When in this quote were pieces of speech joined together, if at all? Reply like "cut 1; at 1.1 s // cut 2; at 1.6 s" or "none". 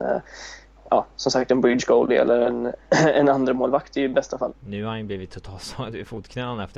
cut 1; at 4.5 s